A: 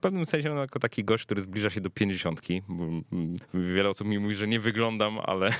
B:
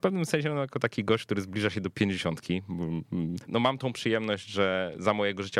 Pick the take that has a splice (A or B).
B